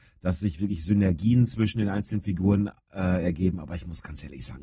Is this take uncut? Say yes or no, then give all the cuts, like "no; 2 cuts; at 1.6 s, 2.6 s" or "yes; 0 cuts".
yes; 0 cuts